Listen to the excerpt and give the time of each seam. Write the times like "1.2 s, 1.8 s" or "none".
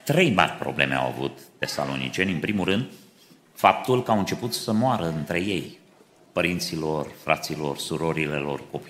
none